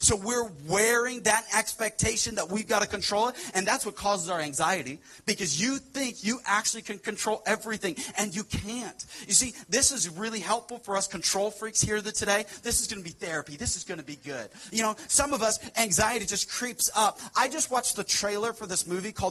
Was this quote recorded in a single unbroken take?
yes; 0 cuts

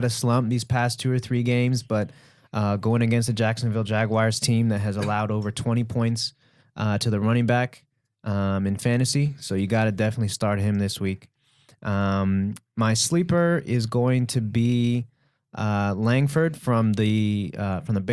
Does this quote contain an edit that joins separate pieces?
no; 0 cuts

